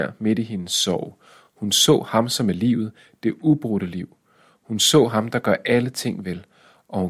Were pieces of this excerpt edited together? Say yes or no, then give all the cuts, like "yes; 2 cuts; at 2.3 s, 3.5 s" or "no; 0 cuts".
no; 0 cuts